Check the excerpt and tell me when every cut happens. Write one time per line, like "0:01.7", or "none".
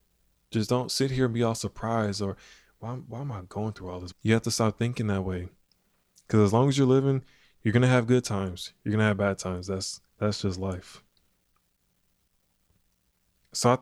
0:04.1
0:10.1

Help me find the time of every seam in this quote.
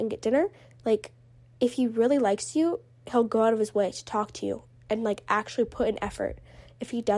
none

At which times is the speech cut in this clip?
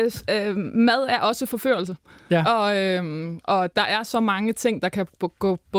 none

